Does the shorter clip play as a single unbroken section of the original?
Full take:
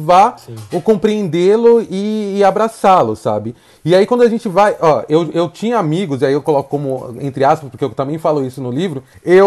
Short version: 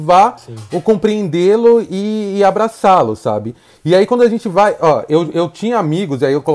yes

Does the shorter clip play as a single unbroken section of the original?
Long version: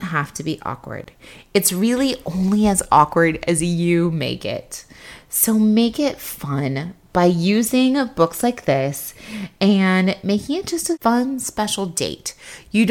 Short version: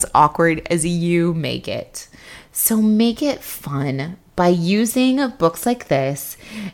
yes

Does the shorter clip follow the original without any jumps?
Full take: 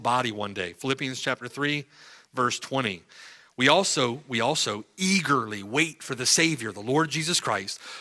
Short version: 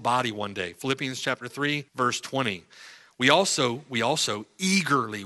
no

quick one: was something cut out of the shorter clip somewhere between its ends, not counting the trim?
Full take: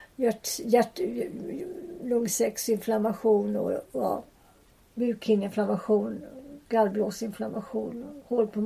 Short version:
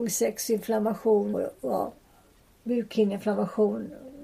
yes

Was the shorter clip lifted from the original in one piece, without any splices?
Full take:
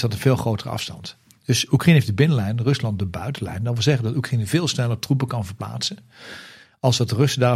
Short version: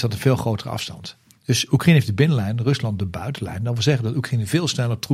yes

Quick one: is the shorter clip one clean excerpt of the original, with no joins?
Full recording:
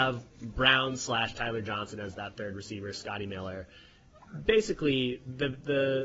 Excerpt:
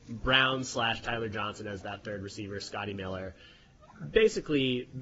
yes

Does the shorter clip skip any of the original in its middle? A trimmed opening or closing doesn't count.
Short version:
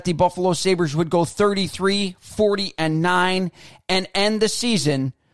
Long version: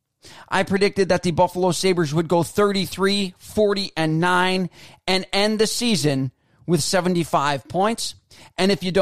no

